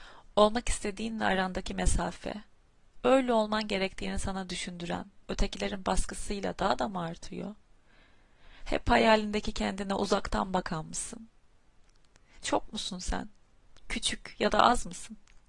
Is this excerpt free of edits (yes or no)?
no